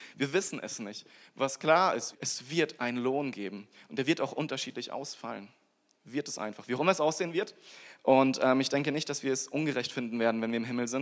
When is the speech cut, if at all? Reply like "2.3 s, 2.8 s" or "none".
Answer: 2.1 s